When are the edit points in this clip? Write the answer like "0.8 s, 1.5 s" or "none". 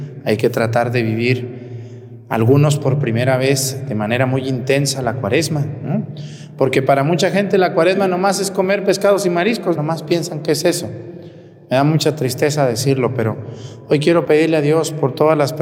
9.8 s